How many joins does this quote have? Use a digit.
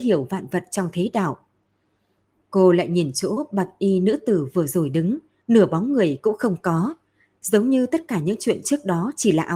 1